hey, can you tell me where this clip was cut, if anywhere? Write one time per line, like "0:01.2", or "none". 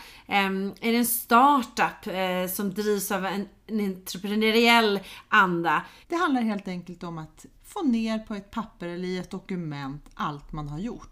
0:06.0
0:07.5